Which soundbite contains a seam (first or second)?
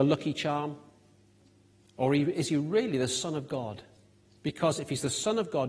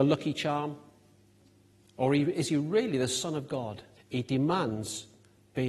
second